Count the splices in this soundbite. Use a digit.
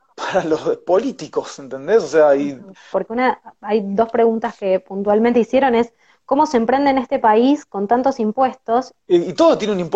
2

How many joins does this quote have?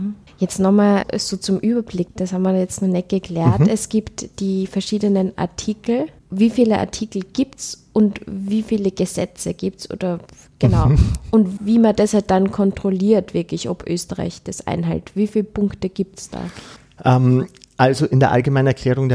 0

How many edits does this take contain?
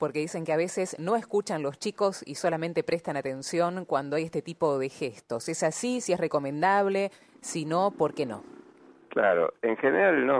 0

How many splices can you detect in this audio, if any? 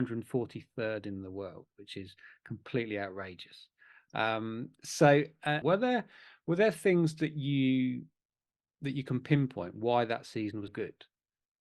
2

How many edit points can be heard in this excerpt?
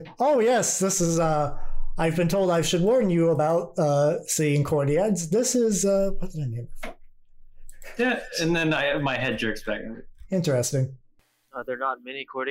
1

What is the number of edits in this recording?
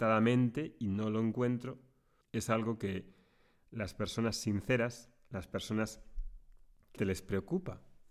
2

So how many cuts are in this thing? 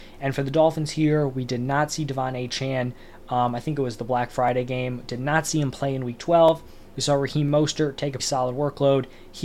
1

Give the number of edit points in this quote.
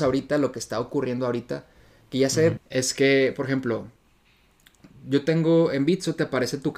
1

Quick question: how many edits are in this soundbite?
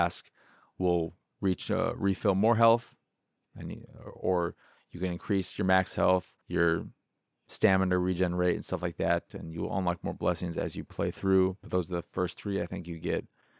2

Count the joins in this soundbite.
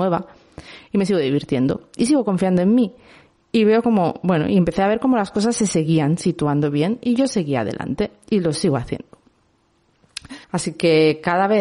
1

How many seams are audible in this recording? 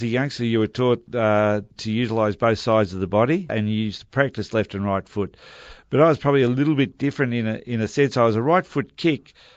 2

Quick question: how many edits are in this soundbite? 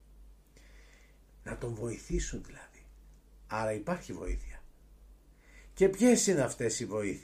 1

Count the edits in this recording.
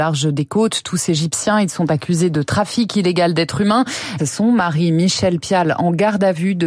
1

